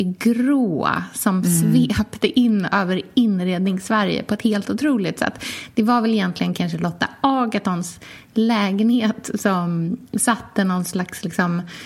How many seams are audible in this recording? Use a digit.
0